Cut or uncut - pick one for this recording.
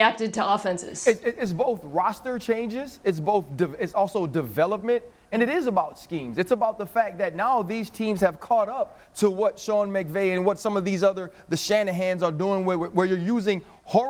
uncut